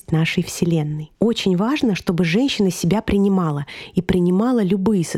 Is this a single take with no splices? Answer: no; 1 cut; at 1.1 s

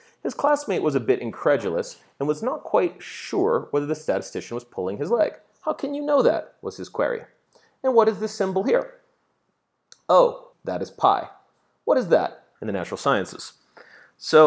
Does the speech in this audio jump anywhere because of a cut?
yes; 2 cuts; at 10.5 s, 12.6 s

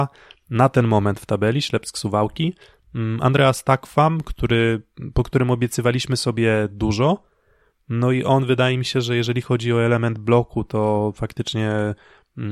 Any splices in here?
no; 0 cuts

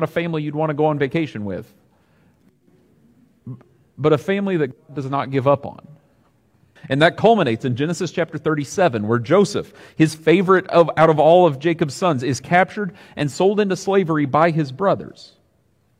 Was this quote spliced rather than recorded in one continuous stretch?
yes; 1 cut; at 6.8 s

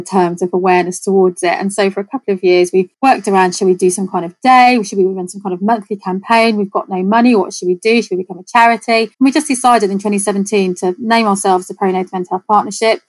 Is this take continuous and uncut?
no; 1 cut; at 9.1 s

